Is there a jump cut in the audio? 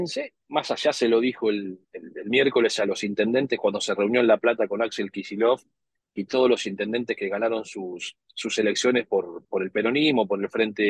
yes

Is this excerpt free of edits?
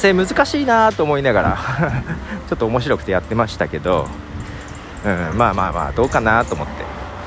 yes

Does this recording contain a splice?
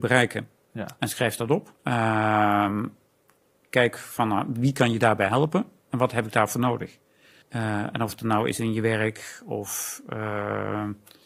yes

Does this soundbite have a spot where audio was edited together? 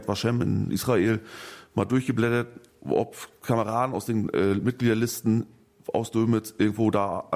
no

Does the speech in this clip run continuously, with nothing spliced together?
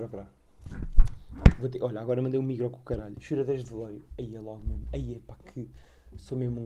no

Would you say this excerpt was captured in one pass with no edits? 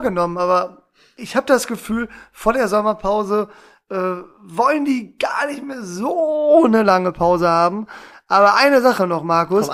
yes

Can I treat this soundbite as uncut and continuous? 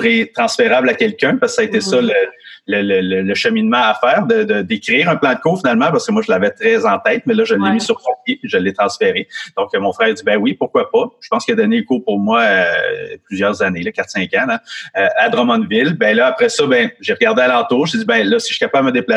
yes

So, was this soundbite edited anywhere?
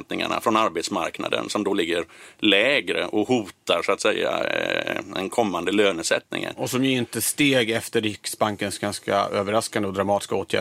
no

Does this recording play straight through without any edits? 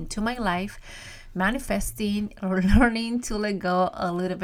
no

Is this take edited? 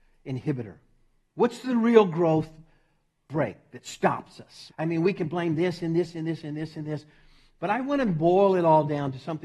yes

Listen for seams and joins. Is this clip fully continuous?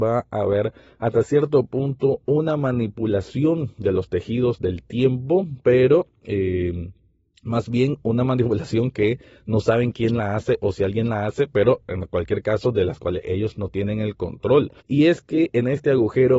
no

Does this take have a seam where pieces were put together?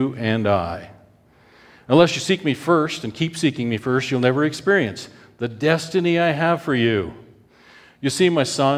no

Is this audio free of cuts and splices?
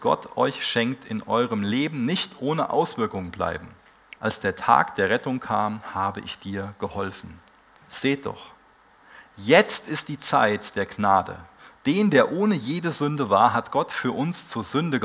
no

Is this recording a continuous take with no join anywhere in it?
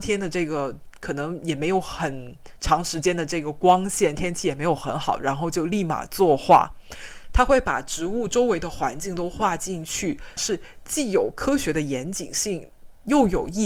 no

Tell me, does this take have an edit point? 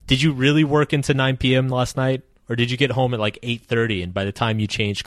no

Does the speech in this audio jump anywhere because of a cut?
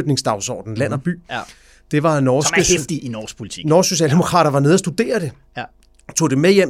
no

